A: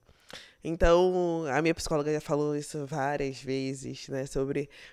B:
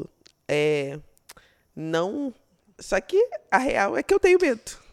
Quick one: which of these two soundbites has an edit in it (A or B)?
B